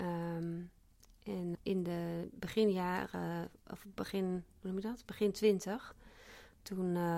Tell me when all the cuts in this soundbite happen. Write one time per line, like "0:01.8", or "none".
0:01.5